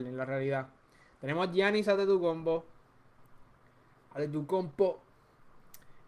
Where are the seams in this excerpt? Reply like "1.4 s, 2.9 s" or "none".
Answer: none